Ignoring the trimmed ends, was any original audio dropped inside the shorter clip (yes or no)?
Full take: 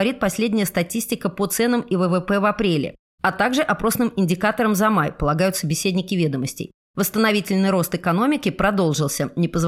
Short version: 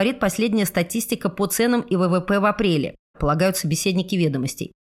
yes